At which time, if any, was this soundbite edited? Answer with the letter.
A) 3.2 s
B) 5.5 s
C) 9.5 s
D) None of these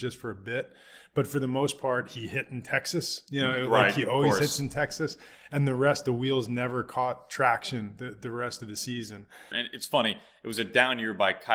C